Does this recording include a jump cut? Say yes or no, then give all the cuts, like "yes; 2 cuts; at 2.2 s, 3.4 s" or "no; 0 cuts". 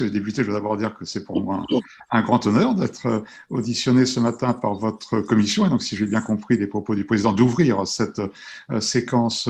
no; 0 cuts